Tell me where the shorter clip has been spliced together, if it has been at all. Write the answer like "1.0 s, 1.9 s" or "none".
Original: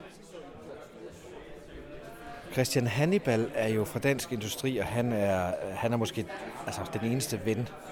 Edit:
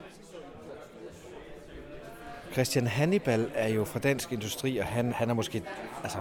5.1 s